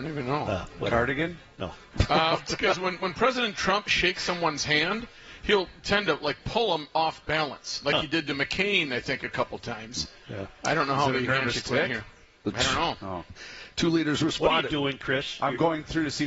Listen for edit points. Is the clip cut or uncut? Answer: uncut